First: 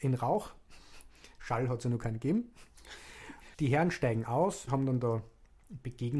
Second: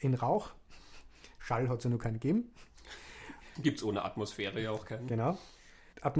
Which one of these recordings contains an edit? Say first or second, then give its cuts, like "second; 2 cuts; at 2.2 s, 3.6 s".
first; 2 cuts; at 3.5 s, 4.7 s